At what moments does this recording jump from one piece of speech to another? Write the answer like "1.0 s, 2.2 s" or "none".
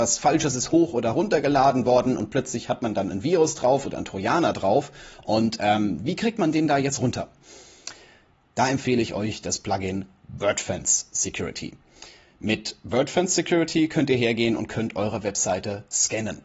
none